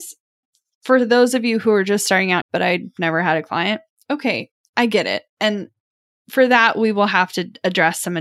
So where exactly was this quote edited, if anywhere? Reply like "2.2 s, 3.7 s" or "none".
2.4 s